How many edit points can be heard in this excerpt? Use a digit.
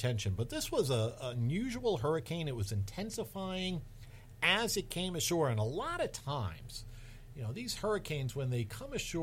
0